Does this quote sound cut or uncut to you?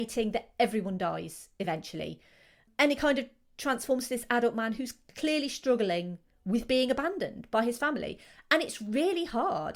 uncut